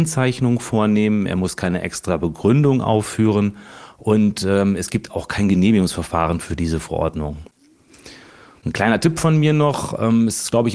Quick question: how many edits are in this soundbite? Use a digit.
0